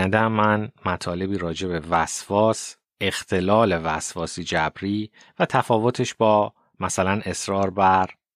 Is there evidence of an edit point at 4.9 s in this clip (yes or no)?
no